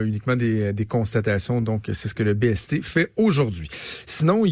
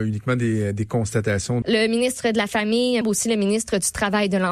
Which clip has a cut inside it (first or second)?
second